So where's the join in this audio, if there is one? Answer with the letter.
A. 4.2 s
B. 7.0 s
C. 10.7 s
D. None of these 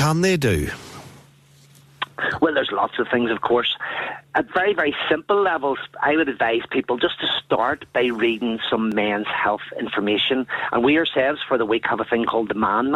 A